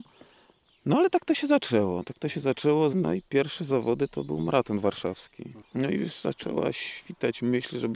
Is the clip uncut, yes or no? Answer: no